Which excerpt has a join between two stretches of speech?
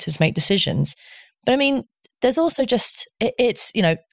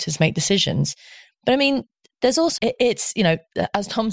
second; 1 cut; at 2.6 s

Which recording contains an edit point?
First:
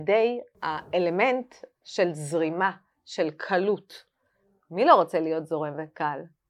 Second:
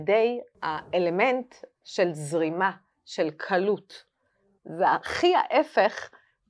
second; 1 cut; at 4.6 s

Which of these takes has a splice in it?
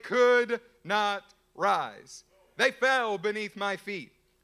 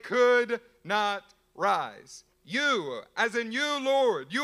second; 1 cut; at 2.3 s

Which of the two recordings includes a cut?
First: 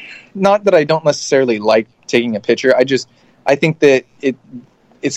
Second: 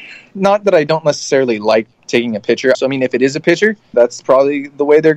second; 2 cuts; at 2.7 s, 3.9 s

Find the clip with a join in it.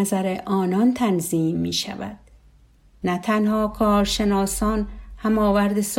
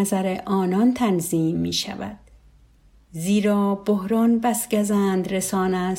first; 1 cut; at 3.0 s

